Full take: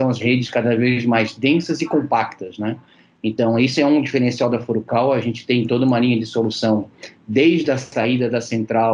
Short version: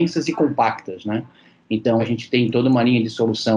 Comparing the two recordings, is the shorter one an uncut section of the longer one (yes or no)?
no